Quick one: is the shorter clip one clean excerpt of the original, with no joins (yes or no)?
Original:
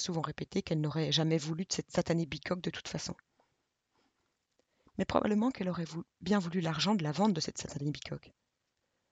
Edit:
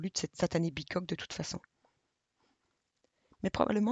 yes